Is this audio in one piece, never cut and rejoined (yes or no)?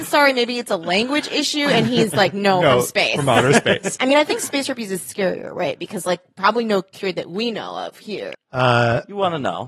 no